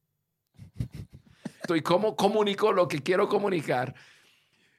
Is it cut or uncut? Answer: cut